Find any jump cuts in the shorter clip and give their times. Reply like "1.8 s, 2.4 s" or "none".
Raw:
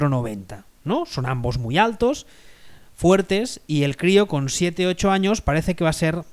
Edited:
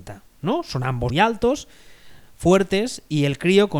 1.1 s